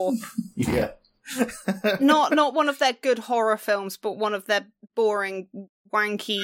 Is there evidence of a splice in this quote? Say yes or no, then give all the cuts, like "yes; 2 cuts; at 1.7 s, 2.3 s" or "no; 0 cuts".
no; 0 cuts